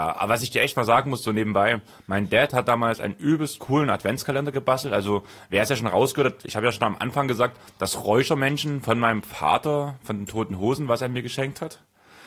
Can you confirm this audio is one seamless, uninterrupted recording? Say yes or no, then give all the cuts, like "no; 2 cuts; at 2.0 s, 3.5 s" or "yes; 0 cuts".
yes; 0 cuts